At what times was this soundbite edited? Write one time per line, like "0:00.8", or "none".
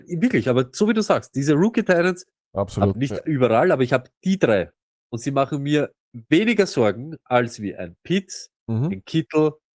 0:02.9